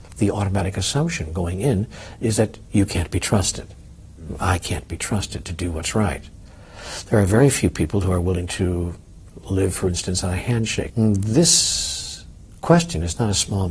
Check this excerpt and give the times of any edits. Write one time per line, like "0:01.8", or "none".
0:10.9